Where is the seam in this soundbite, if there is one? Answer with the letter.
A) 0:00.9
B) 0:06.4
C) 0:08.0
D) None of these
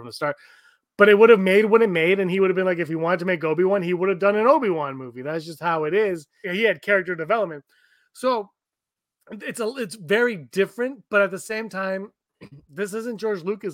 B